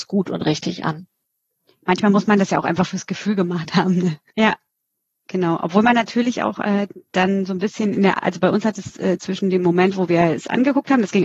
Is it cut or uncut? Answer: cut